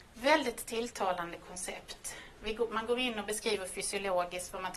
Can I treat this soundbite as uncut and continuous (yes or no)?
yes